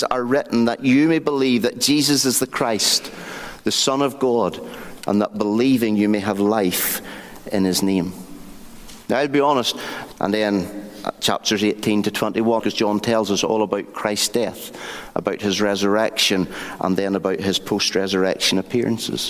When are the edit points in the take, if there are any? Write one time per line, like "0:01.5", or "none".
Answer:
0:10.2
0:12.6